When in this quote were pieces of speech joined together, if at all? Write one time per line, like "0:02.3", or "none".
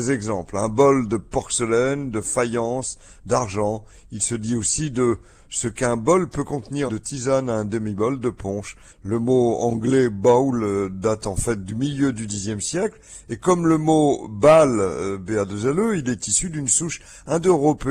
0:06.9
0:08.9